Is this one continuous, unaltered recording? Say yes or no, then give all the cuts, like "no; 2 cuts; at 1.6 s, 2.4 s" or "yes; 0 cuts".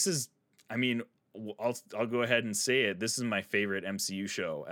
yes; 0 cuts